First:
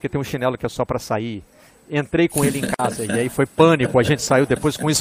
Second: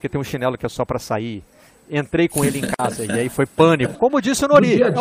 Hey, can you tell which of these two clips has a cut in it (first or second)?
second